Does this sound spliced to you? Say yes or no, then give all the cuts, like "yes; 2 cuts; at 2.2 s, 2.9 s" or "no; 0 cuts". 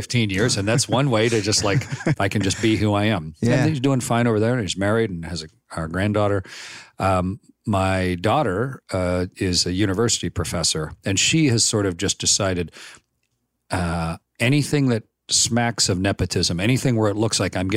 yes; 1 cut; at 2.1 s